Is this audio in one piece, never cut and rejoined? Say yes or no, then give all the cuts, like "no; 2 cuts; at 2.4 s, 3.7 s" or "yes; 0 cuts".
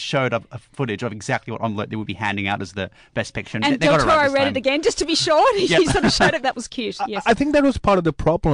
no; 1 cut; at 6.4 s